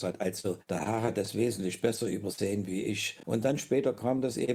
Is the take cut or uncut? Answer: uncut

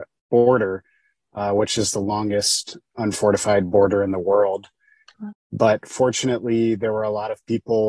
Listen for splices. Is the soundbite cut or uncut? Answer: cut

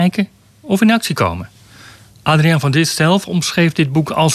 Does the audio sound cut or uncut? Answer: uncut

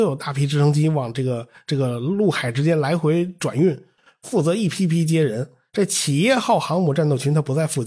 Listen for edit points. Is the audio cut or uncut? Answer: cut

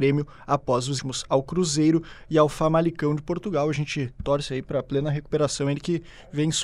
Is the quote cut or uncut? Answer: cut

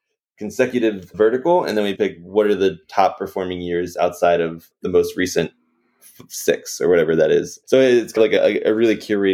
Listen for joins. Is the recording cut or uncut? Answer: cut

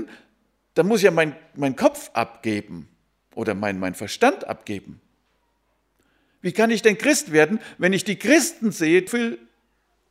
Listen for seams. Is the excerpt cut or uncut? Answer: cut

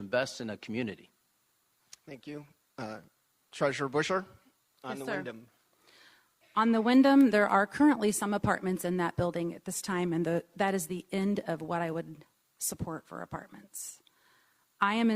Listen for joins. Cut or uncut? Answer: uncut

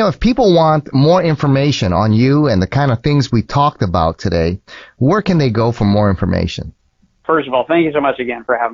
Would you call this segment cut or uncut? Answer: uncut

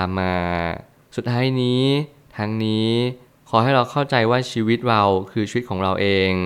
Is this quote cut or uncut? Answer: uncut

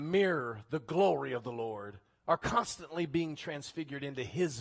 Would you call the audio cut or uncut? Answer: uncut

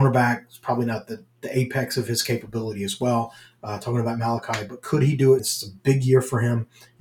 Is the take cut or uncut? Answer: cut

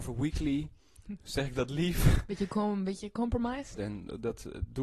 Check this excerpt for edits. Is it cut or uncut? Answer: cut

